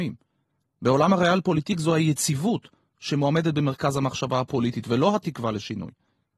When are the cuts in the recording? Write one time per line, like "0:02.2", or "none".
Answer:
none